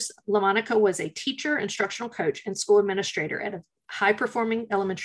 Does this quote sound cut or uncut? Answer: uncut